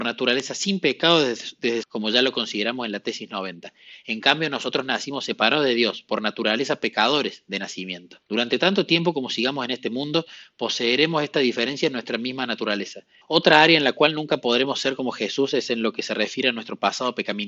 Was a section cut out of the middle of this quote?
yes; 3 cuts; at 1.8 s, 8.2 s, 13.2 s

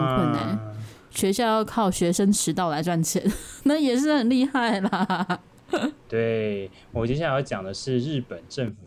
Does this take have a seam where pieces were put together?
yes; 1 cut; at 6.1 s

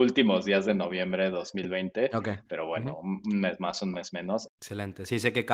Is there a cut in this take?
yes; 1 cut; at 4.5 s

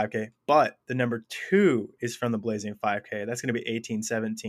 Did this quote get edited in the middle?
no; 0 cuts

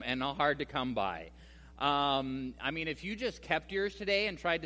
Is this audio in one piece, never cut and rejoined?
yes; 0 cuts

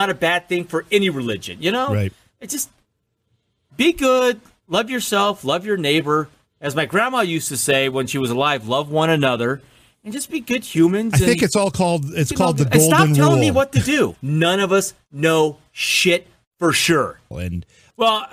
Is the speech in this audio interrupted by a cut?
yes; 2 cuts; at 14.1 s, 17.3 s

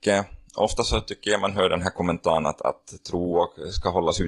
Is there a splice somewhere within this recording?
no; 0 cuts

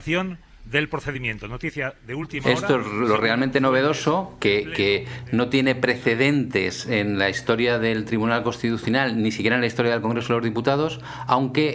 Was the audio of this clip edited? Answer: no; 0 cuts

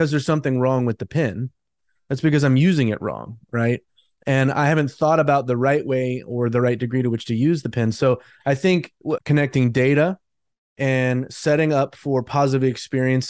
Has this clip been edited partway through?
yes; 1 cut; at 9.2 s

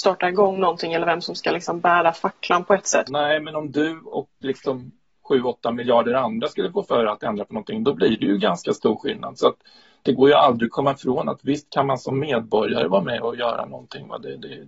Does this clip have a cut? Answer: yes; 1 cut; at 3.0 s

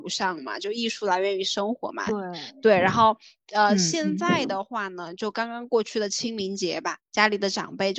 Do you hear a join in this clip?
no; 0 cuts

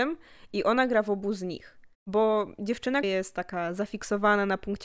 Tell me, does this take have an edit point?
yes; 2 cuts; at 1.9 s, 3.0 s

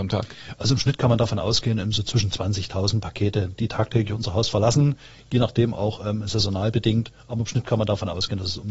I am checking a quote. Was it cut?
no; 0 cuts

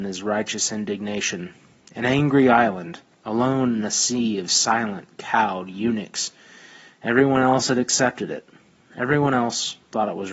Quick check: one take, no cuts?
yes; 0 cuts

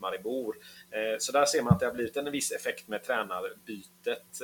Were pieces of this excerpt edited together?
no; 0 cuts

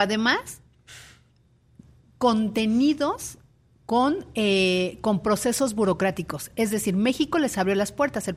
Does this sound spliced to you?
no; 0 cuts

